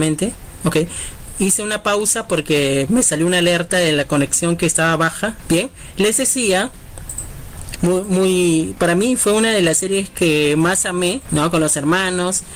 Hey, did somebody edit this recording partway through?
yes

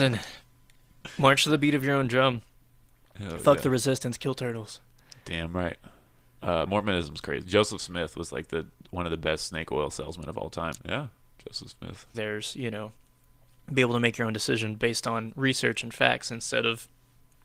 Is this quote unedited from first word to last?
no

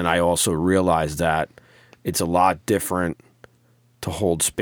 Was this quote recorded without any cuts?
yes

